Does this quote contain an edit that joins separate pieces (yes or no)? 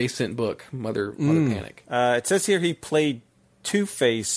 no